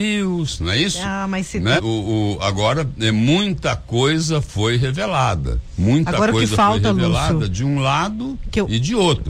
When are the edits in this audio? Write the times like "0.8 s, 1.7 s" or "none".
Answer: 1.8 s